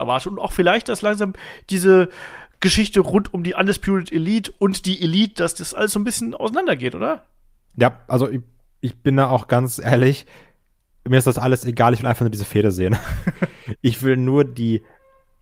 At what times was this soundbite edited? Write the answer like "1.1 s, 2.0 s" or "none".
none